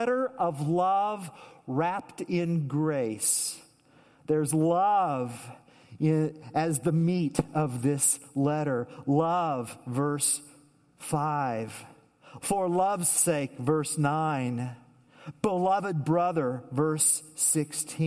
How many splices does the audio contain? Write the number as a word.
one